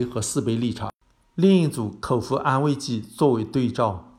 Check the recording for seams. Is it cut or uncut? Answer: uncut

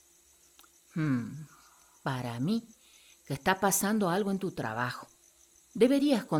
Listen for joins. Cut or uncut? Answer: uncut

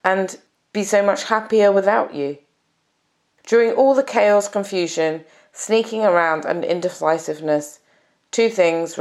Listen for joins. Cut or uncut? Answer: uncut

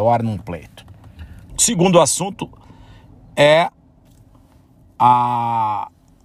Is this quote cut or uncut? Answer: cut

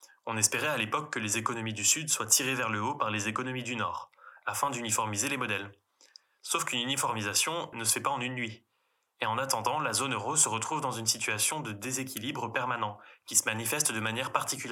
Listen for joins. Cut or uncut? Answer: cut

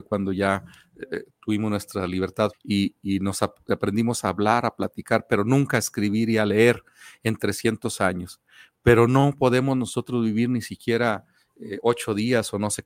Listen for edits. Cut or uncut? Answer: cut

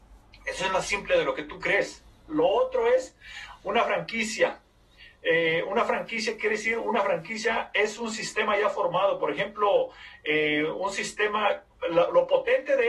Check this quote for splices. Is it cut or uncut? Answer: cut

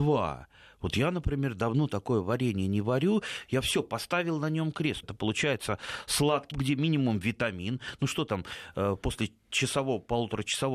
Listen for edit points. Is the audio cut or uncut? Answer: cut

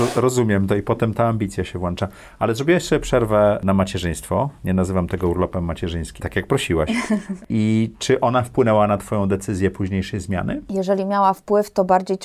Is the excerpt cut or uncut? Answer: cut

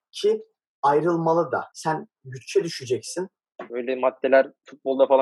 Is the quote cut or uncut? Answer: cut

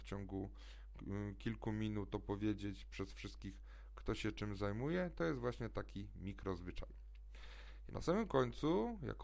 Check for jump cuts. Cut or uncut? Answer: cut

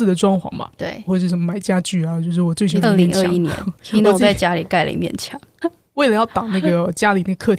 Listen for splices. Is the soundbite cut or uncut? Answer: cut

